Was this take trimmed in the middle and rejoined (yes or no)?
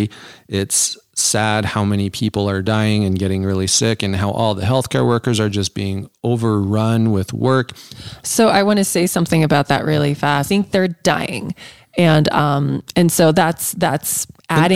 yes